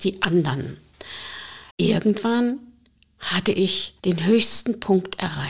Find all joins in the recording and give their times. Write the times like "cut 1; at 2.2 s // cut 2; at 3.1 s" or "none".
cut 1; at 1.7 s // cut 2; at 4.0 s